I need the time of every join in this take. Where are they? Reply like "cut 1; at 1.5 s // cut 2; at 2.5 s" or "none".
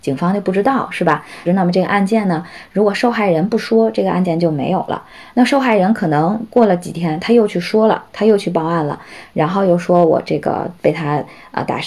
cut 1; at 1.5 s